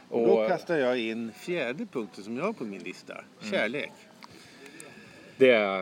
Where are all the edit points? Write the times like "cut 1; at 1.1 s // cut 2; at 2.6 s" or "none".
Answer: none

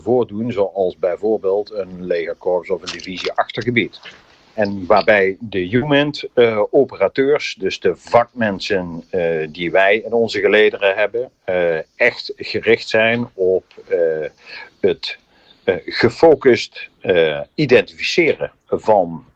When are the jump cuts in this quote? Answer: none

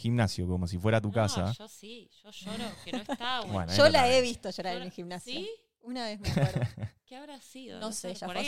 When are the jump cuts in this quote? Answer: none

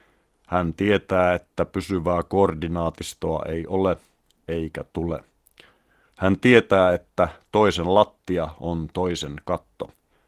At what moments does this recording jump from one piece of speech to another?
none

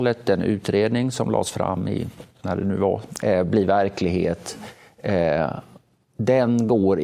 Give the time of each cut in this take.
cut 1; at 3.2 s

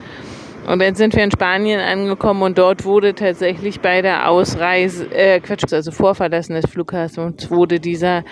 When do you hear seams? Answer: cut 1; at 5.7 s

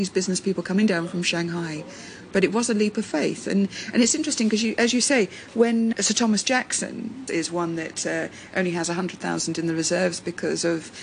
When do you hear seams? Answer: cut 1; at 7.3 s

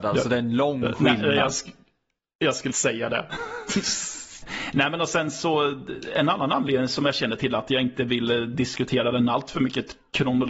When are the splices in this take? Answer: cut 1; at 2.7 s // cut 2; at 4.4 s

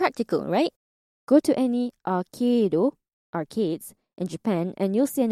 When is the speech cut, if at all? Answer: cut 1; at 1.2 s

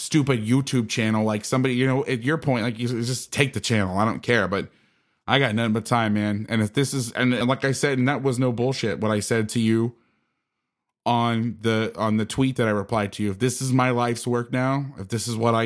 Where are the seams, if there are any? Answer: none

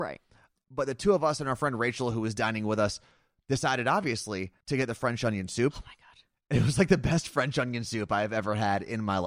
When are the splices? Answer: cut 1; at 4.6 s

